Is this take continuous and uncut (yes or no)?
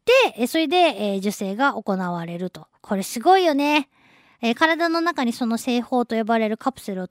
no